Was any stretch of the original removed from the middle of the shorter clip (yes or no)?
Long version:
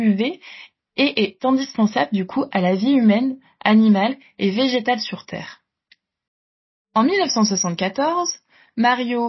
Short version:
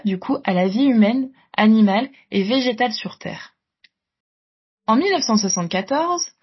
no